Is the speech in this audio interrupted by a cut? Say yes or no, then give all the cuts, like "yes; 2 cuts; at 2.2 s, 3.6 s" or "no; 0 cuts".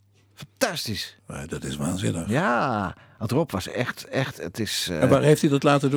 no; 0 cuts